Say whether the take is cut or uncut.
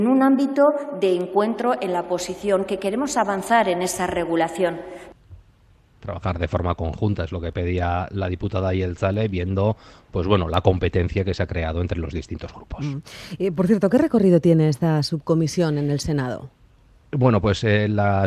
uncut